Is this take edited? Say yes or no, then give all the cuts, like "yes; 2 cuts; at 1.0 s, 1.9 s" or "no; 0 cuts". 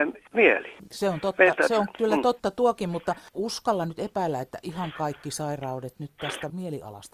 no; 0 cuts